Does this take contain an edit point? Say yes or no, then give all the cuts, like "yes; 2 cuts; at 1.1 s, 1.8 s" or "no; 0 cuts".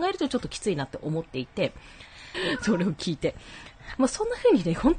yes; 2 cuts; at 2.3 s, 4.0 s